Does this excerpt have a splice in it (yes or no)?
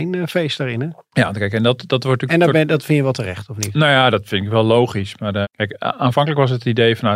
yes